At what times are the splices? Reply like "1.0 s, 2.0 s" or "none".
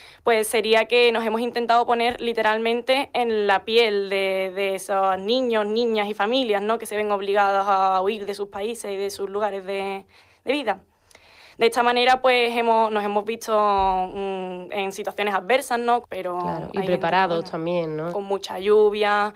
16.0 s, 18.1 s